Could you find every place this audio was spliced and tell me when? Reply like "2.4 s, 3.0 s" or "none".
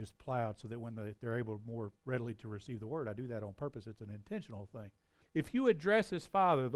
5.2 s